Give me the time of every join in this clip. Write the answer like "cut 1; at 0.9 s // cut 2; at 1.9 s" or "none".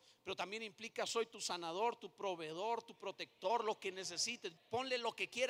cut 1; at 4.6 s